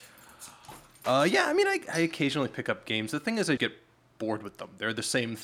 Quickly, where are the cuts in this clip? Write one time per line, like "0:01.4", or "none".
0:01.0
0:03.6